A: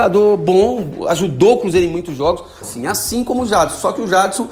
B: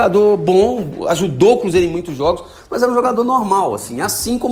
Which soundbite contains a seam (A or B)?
A